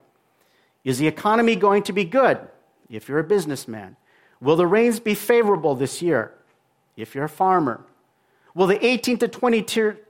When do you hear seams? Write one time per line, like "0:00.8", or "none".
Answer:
none